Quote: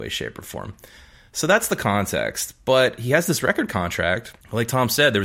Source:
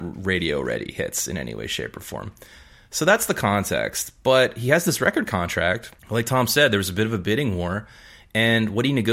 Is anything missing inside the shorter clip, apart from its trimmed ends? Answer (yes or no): no